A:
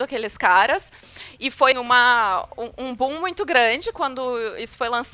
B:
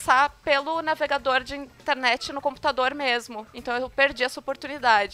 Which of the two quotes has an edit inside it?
A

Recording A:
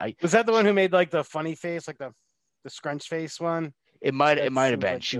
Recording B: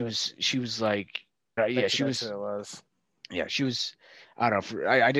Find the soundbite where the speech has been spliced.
B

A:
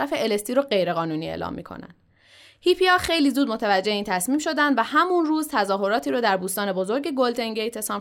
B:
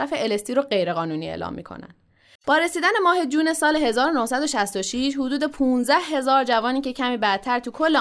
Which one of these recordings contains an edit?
B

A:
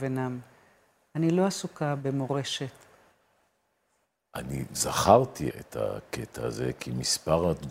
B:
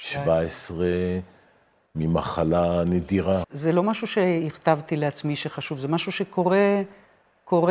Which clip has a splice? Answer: B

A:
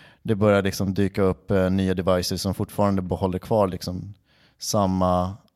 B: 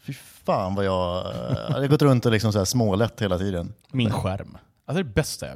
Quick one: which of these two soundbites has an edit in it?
B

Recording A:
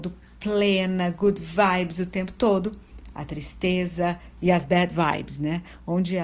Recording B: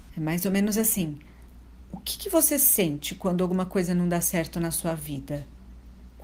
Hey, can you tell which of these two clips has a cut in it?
A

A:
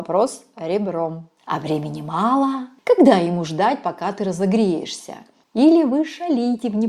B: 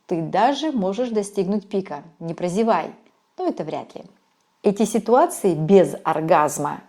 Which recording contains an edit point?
A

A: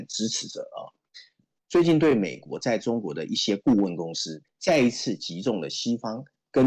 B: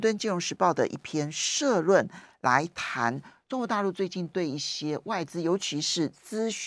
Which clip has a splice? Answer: A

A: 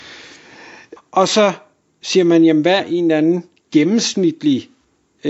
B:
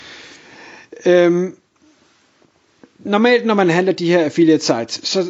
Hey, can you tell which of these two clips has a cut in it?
A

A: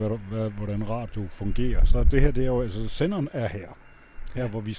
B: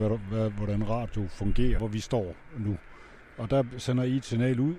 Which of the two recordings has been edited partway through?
B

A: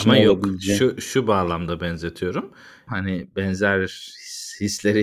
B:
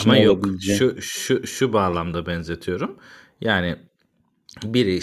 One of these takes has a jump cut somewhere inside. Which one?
A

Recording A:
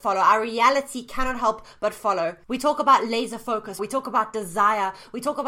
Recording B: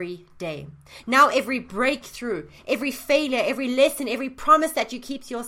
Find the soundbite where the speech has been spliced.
A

